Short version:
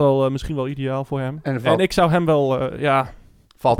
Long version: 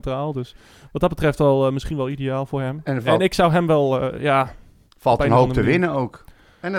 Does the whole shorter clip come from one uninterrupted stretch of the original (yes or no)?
yes